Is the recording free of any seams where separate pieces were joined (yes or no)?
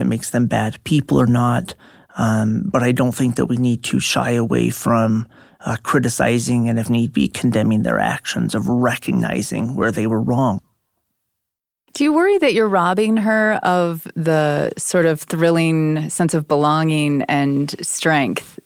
yes